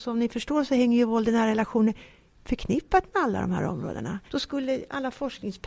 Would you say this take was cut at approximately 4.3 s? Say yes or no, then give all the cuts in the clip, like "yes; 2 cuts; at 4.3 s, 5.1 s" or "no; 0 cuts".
yes; 1 cut; at 4.3 s